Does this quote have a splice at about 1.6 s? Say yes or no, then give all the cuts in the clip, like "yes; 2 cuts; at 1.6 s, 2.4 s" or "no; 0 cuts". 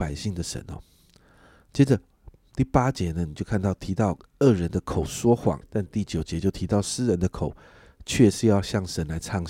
no; 1 cut; at 5.6 s